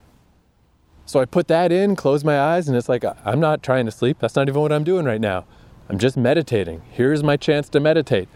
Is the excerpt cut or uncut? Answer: uncut